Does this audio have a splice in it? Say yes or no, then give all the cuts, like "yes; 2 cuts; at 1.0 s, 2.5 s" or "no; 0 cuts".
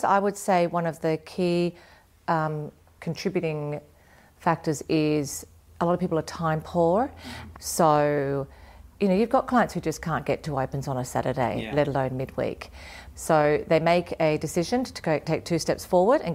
yes; 2 cuts; at 7.5 s, 13.1 s